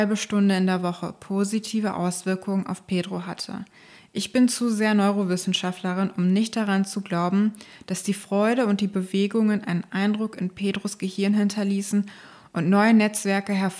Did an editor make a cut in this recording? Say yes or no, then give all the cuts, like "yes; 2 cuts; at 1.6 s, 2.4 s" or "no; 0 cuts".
no; 0 cuts